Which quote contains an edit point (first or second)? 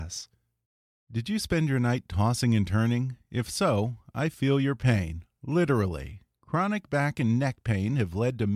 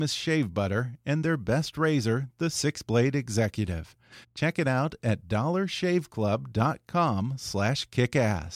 second